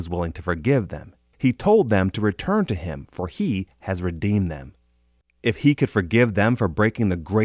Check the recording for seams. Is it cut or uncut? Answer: cut